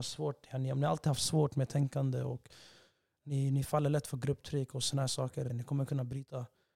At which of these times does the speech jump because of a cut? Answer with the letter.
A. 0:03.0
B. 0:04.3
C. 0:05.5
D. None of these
C